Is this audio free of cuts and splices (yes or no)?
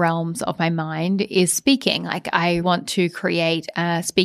no